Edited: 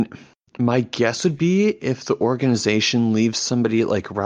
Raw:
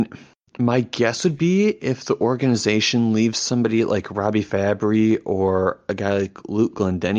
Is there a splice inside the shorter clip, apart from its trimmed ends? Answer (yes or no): no